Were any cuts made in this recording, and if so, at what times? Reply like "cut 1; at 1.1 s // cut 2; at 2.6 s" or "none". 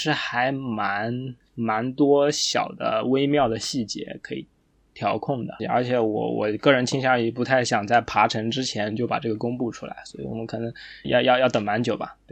cut 1; at 5.6 s // cut 2; at 11.0 s